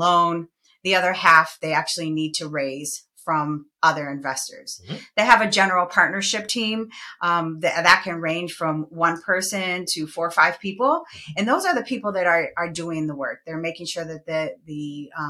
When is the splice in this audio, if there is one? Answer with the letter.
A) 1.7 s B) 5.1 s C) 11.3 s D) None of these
D